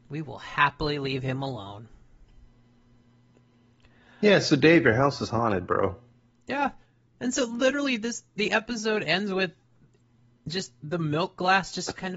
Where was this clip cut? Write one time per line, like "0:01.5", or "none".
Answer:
none